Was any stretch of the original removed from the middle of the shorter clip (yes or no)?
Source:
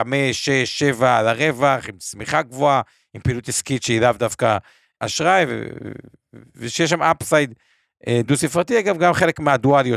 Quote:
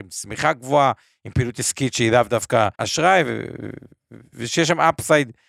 yes